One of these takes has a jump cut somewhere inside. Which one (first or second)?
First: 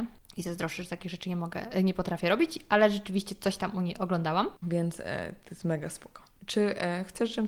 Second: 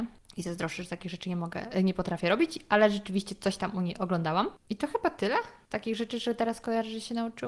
first